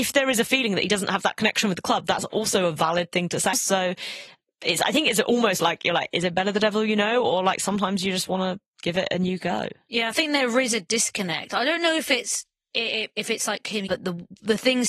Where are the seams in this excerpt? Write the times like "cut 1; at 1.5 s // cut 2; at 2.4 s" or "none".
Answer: cut 1; at 3.5 s // cut 2; at 13.9 s